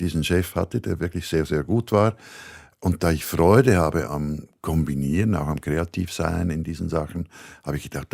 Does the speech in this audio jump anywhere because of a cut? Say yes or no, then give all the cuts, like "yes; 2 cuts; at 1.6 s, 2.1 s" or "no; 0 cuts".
yes; 1 cut; at 4.0 s